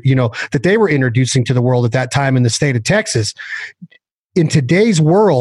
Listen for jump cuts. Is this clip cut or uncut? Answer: uncut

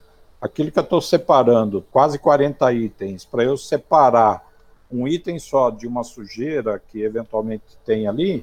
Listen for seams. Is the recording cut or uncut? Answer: uncut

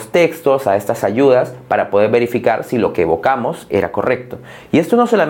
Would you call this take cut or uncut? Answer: uncut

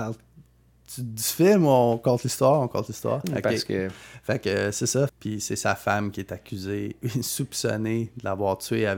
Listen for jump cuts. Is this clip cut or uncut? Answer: cut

